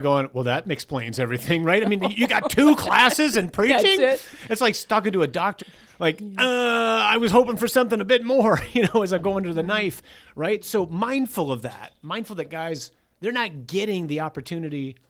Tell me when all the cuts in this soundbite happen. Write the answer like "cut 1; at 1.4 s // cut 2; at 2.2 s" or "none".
cut 1; at 5.6 s